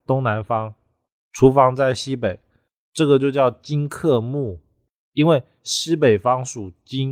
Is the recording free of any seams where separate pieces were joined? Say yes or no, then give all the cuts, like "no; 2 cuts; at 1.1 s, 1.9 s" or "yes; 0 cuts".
yes; 0 cuts